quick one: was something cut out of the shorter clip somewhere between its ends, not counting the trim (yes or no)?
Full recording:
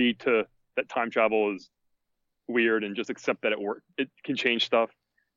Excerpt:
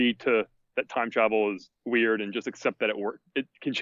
yes